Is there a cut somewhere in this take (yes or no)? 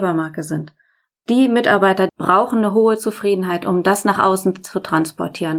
yes